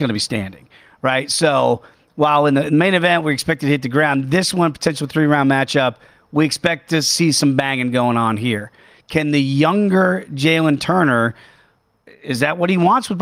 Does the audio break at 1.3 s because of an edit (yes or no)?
no